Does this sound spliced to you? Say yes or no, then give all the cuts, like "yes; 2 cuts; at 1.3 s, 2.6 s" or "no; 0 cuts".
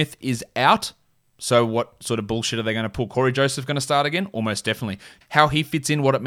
yes; 1 cut; at 5.2 s